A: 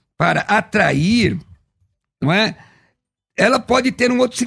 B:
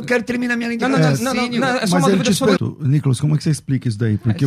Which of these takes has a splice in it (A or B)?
B